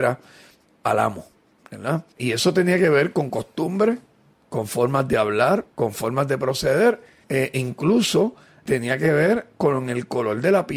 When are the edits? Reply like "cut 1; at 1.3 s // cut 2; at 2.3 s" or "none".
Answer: cut 1; at 2.1 s // cut 2; at 5.7 s

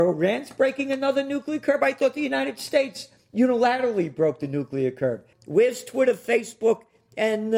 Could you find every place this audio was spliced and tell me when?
cut 1; at 5.3 s

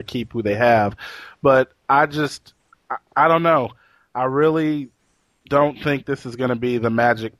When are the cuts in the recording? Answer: none

